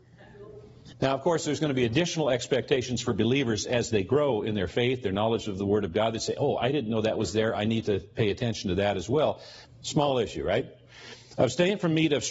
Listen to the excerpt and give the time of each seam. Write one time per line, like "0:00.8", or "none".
0:00.9
0:09.7